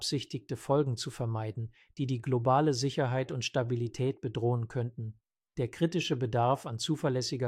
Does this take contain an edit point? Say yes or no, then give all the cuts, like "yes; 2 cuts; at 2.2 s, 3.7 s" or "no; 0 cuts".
no; 0 cuts